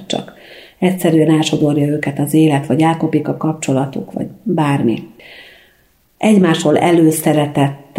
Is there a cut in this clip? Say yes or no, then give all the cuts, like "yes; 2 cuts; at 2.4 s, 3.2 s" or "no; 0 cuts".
no; 0 cuts